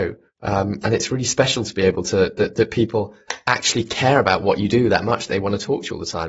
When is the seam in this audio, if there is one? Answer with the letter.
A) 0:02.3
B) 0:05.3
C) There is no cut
C